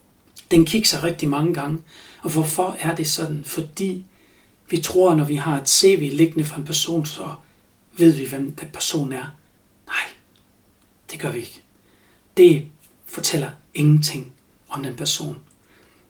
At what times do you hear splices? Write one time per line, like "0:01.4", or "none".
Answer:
none